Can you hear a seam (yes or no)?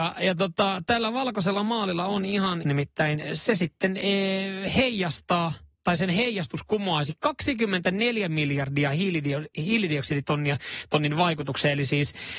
yes